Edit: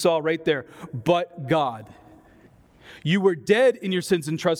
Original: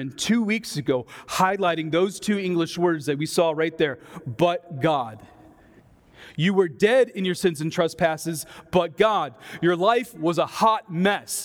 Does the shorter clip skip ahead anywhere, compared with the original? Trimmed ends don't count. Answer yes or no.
no